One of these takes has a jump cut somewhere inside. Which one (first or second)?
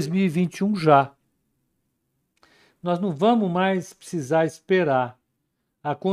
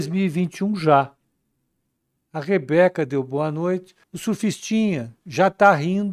second